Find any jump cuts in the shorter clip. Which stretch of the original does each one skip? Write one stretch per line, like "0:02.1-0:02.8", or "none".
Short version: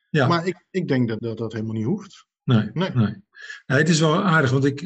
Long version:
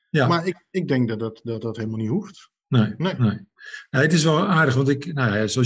0:01.2-0:01.4